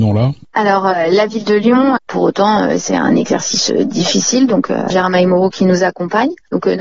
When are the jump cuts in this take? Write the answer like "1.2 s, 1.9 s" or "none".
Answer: 2.0 s, 4.9 s